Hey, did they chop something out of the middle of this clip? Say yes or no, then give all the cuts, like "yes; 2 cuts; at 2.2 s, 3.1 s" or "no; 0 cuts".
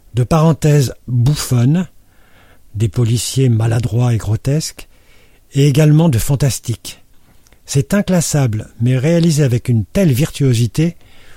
no; 0 cuts